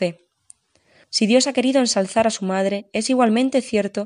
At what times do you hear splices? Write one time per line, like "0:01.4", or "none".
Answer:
0:01.0